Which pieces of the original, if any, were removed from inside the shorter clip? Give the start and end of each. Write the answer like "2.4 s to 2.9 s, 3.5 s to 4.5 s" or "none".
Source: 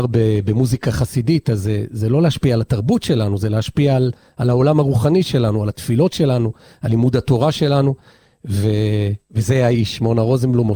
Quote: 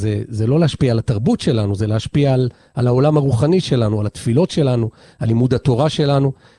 none